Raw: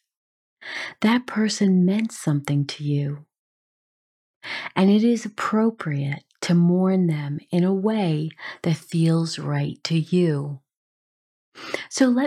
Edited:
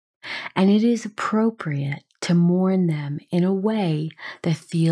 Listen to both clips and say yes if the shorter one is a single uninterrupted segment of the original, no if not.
yes